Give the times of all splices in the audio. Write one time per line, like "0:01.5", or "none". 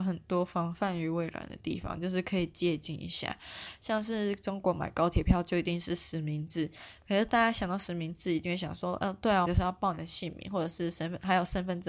0:09.4